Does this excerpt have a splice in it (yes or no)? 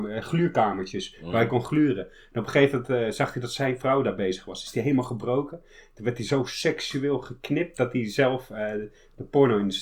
no